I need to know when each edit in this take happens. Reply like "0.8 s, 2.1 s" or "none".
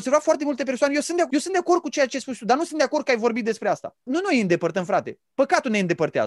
1.3 s, 4.1 s